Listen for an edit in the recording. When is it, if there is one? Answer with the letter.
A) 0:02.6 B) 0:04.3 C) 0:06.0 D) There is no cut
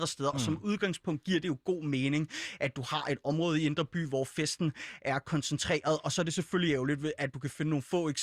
D